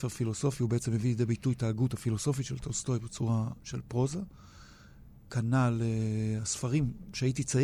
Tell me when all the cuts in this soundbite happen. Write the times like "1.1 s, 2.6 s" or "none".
3.6 s